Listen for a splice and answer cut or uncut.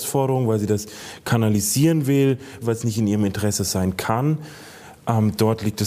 cut